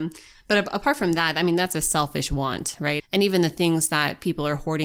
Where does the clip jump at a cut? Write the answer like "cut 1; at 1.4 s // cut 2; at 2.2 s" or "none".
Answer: cut 1; at 3.0 s